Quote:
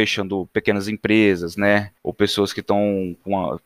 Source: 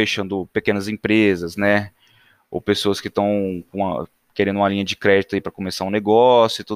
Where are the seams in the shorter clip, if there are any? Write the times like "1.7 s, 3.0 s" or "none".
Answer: 2.0 s